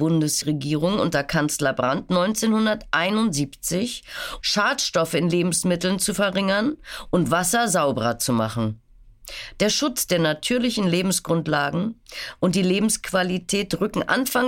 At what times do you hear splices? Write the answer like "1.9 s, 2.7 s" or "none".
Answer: 4.4 s

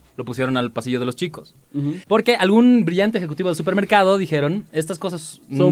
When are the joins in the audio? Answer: 2.0 s

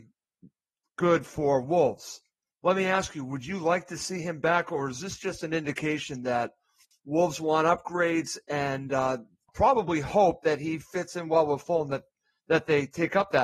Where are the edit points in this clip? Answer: 2.5 s

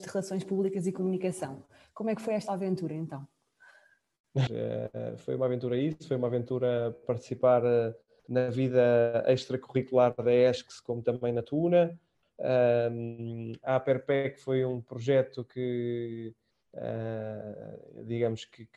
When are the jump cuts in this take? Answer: 4.5 s, 12.2 s

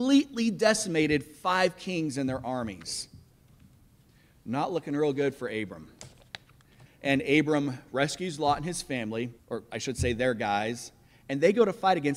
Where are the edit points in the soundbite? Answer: 6.9 s, 9.4 s

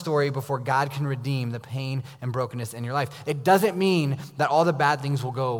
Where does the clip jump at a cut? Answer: none

